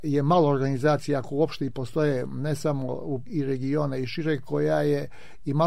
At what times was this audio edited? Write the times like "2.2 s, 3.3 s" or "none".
3.3 s